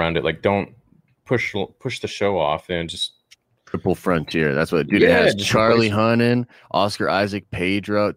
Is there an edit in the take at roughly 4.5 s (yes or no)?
no